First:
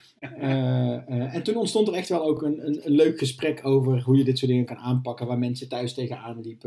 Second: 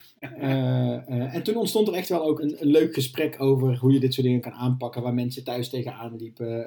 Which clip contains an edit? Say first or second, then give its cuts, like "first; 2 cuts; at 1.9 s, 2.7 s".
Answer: second; 1 cut; at 2.4 s